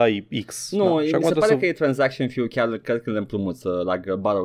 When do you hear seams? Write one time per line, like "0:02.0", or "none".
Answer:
none